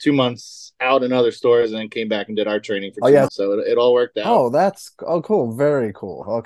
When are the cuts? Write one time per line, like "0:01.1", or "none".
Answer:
0:03.3